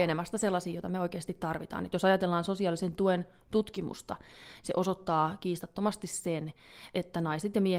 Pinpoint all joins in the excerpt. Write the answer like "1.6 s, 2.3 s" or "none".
none